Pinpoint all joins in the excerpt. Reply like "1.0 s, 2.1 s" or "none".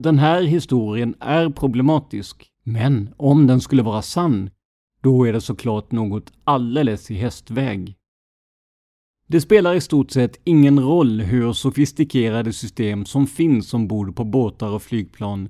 2.5 s, 9.1 s